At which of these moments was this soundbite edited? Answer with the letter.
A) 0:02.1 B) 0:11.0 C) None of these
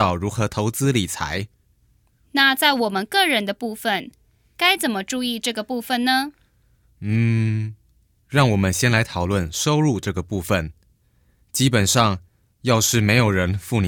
C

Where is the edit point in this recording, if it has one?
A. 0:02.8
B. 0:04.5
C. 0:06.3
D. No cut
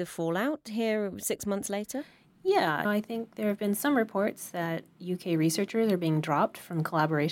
A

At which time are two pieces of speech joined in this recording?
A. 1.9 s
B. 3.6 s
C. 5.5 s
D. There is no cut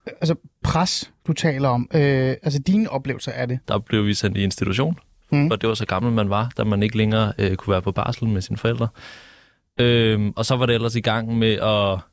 B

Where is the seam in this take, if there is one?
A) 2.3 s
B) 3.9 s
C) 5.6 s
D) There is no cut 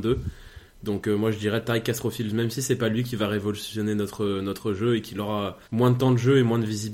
C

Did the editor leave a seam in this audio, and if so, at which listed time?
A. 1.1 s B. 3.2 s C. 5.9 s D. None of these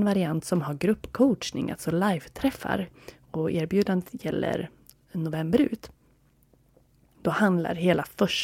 D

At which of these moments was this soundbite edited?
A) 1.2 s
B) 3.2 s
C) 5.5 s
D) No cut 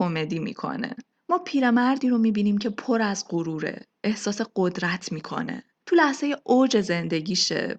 D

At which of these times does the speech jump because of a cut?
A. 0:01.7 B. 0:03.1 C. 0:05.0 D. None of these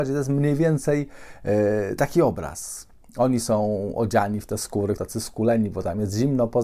C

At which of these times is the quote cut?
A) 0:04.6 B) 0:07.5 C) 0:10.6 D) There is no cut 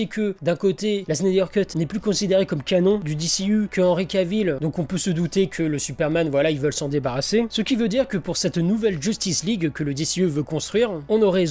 A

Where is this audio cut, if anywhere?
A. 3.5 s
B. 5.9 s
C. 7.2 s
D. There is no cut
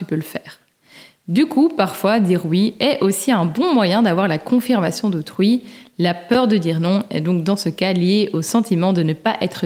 D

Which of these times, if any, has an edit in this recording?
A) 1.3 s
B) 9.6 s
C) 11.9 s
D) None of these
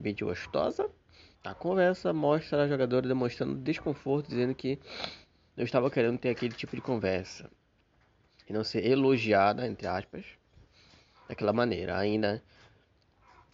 A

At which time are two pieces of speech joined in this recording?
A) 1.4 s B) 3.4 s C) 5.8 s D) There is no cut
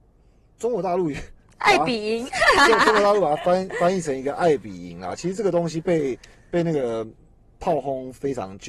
D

